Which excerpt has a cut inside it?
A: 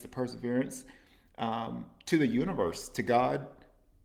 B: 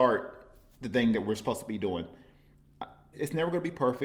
B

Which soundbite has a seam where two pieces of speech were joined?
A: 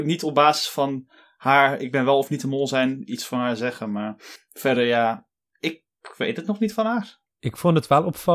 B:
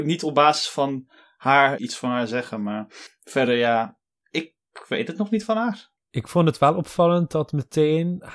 B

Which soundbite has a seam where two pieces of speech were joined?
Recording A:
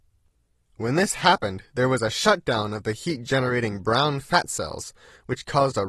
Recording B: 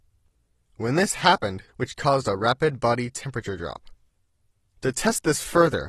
B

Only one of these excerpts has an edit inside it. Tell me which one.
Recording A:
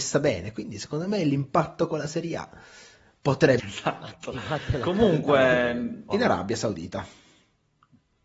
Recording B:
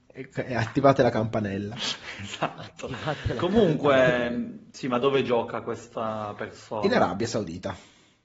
A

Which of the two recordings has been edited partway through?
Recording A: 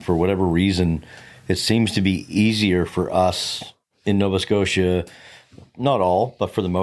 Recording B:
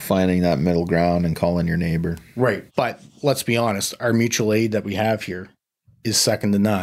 B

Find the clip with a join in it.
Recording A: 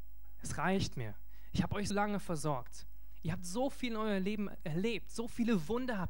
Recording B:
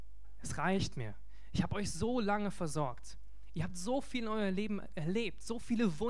A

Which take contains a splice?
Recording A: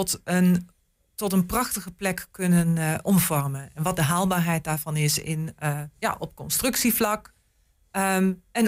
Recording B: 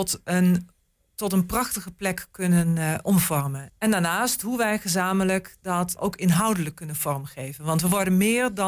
B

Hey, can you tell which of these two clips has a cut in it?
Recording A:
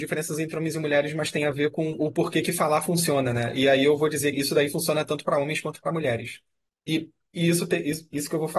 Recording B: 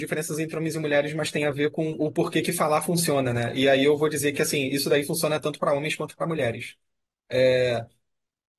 A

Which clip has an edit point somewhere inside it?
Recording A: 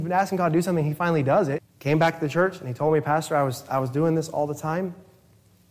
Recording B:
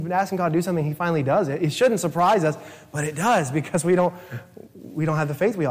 A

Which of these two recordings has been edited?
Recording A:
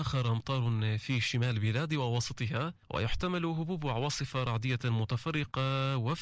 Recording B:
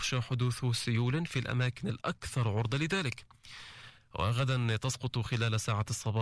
A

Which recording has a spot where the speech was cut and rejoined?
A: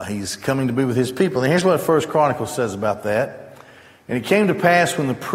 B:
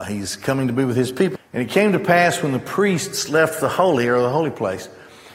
B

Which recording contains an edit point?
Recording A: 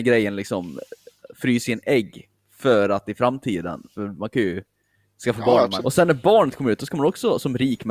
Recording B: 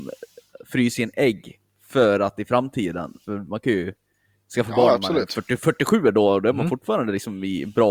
A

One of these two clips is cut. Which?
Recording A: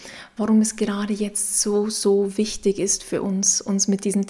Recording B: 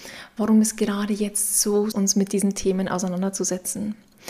B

